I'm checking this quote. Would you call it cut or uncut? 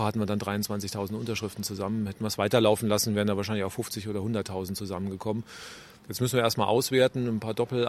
uncut